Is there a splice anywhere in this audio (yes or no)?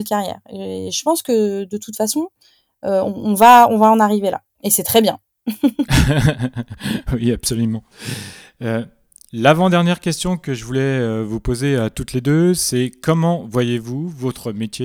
no